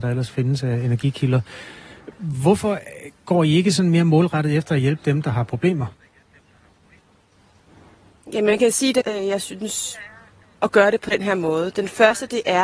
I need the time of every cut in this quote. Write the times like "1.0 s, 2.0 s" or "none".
9.0 s, 10.6 s